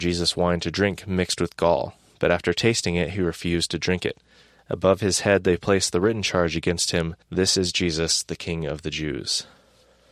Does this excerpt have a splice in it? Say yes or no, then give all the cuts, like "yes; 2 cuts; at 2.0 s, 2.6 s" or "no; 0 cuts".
yes; 2 cuts; at 4.6 s, 7.2 s